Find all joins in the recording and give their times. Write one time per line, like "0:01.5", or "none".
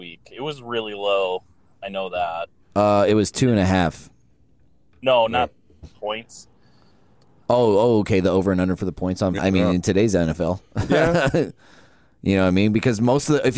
0:05.8
0:09.4

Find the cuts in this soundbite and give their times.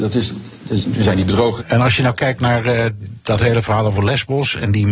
0:01.6

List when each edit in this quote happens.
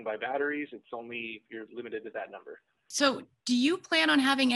none

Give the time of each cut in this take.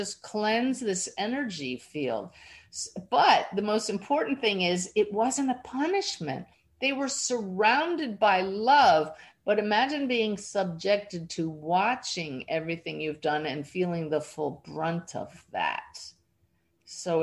none

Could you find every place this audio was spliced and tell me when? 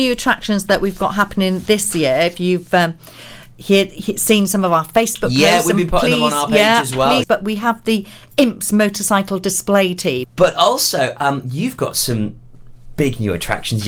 0:07.2
0:10.2

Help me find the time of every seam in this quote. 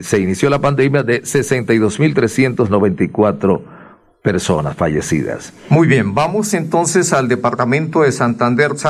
none

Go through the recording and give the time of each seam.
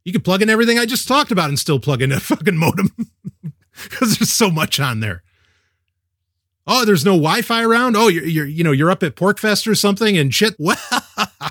0:10.6

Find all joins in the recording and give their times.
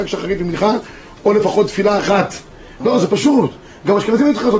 0:02.8

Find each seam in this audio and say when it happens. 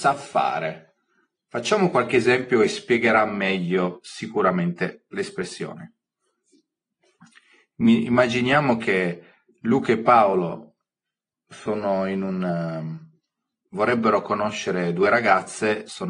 0:13.7

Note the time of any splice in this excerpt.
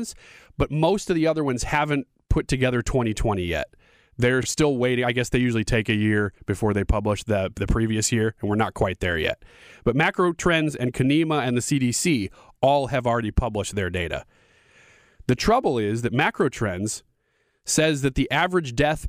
none

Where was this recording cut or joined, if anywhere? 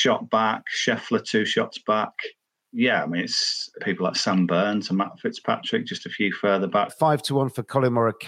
0:03.8
0:06.9

